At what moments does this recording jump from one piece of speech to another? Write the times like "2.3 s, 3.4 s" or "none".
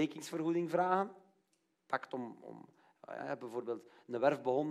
3.2 s